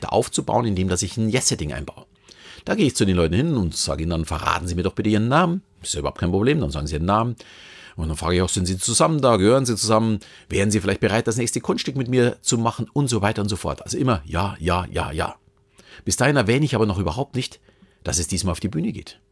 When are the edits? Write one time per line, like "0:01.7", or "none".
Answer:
none